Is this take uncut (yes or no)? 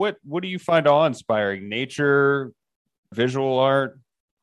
no